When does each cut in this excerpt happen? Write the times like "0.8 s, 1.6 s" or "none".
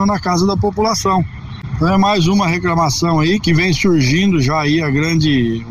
3.4 s